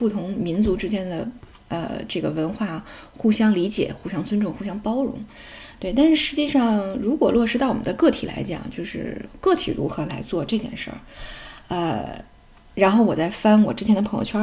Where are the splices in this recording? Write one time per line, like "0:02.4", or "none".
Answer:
none